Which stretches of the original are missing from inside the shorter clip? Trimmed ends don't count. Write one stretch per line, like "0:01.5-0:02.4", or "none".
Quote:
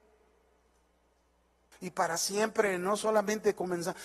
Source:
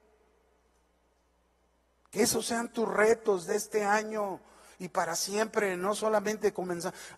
0:01.7-0:04.7